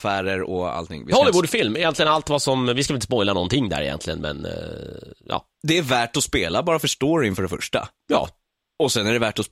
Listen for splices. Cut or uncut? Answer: uncut